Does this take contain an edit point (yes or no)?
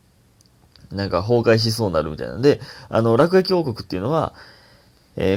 no